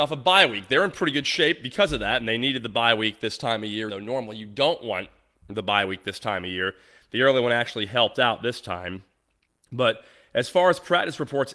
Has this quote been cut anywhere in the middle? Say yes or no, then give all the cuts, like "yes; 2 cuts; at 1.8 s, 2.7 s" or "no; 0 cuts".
yes; 1 cut; at 3.9 s